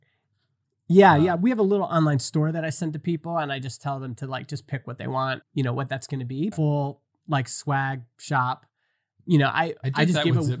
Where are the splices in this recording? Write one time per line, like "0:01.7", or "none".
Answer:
0:05.4
0:06.5